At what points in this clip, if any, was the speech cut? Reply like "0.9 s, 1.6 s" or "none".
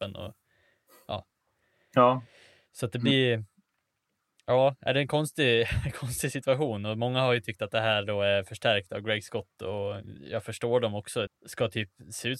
10.2 s, 11.3 s